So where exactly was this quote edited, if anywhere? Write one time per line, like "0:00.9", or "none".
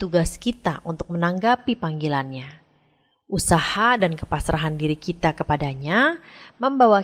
none